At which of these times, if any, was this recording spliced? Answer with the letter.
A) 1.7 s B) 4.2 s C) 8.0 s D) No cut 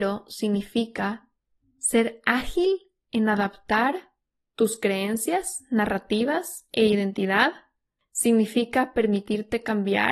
D